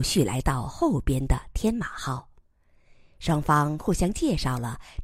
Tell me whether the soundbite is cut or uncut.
uncut